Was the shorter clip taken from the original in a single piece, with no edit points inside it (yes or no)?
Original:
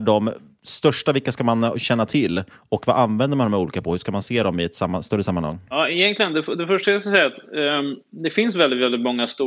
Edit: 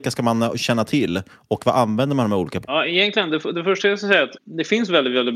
no